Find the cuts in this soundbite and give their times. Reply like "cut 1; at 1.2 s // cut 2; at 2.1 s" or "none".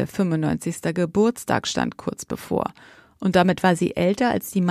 none